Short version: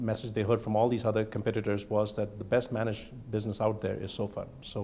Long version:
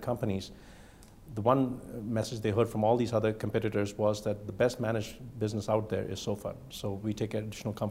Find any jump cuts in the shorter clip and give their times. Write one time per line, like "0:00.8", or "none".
none